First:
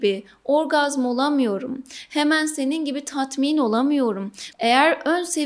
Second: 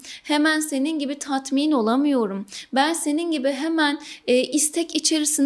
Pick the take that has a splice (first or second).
first